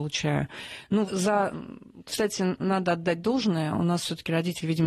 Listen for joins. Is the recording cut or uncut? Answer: cut